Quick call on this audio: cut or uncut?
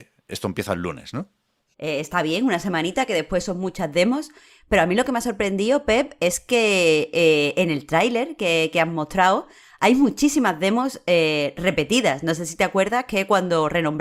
cut